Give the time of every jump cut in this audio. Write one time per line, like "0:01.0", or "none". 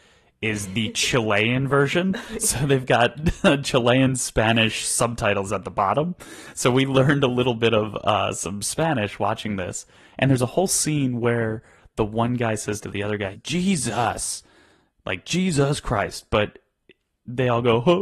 0:13.3